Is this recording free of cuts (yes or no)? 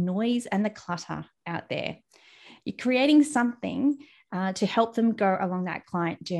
no